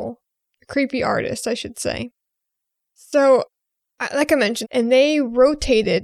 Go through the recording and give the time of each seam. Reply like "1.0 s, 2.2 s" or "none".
4.6 s